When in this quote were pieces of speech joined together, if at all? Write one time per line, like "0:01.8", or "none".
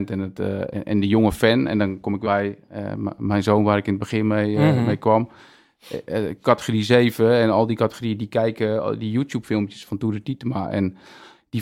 0:02.2
0:09.9